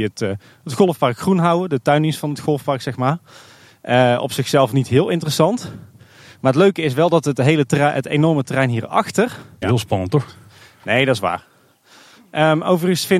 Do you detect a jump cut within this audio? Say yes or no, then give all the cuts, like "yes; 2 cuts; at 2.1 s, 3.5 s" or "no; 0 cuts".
yes; 1 cut; at 9.6 s